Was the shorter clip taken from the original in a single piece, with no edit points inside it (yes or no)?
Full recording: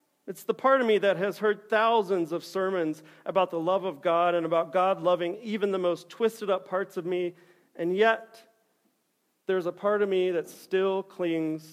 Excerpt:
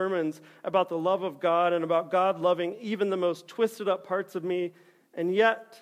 yes